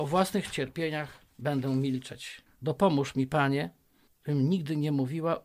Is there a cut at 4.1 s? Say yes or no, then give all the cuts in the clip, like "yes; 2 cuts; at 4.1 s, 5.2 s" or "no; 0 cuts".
yes; 2 cuts; at 2.5 s, 4.1 s